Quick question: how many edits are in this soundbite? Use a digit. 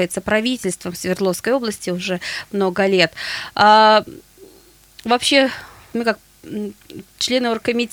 1